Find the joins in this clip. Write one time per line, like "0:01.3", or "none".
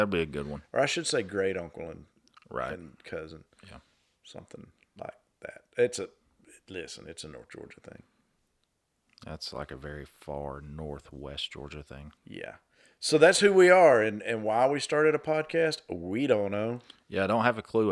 0:12.2

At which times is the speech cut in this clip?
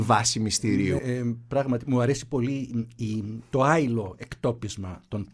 0:01.0

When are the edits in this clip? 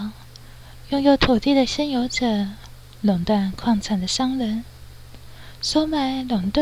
none

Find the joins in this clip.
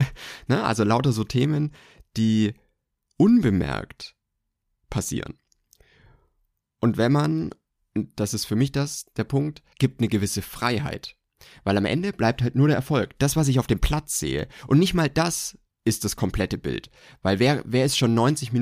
0:09.7

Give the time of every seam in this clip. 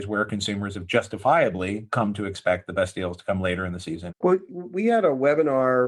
0:04.1

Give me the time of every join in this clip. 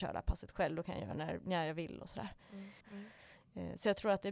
0:02.8

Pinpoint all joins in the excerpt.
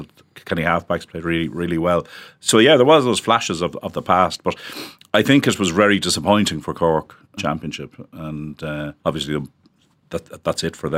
0:07.4
0:09.0

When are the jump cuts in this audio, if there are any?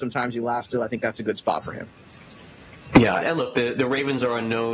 0:03.2

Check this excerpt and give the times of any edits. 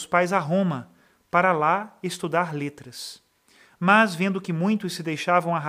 none

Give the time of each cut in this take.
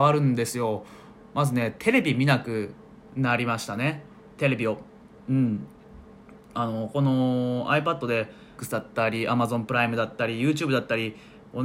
0:06.9
0:08.6

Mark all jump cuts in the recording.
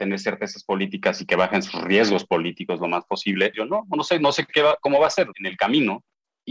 0:03.5
0:05.3

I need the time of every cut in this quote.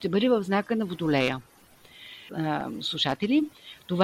0:02.3

